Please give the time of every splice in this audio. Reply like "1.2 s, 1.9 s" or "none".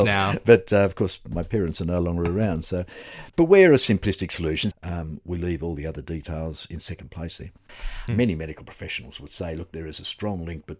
3.3 s, 4.7 s, 8.1 s